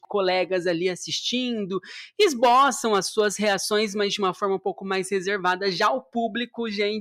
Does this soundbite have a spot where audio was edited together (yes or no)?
no